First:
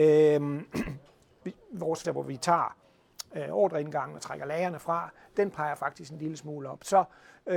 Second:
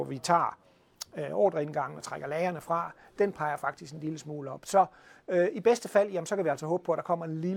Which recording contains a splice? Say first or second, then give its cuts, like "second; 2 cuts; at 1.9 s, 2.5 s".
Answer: first; 1 cut; at 2.0 s